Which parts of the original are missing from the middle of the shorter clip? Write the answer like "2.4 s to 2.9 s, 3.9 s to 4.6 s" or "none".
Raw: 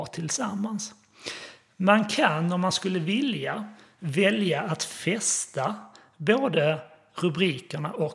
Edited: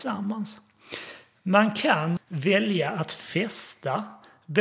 2.5 s to 3.9 s